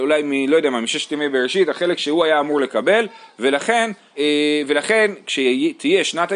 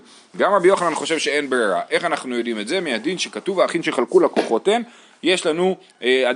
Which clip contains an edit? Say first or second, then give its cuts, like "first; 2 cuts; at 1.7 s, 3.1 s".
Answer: first; 1 cut; at 4.2 s